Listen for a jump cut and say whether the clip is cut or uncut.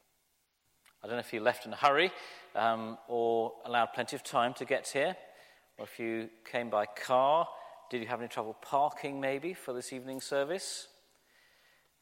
uncut